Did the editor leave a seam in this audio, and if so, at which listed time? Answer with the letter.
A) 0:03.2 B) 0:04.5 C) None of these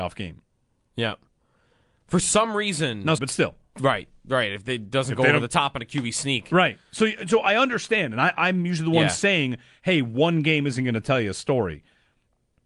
A